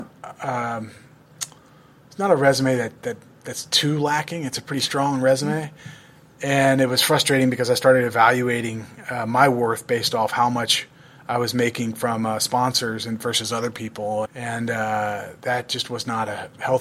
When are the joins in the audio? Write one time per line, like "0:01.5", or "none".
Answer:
0:14.3